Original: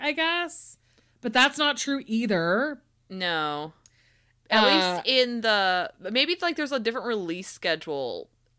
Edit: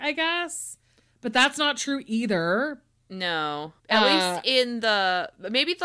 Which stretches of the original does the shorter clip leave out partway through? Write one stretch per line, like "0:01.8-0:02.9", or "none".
0:03.8-0:04.4